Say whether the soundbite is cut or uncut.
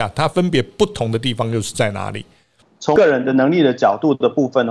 uncut